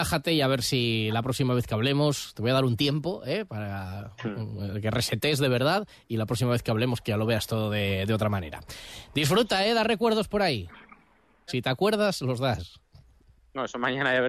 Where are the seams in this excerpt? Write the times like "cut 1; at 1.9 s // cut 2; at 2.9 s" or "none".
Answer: cut 1; at 11.5 s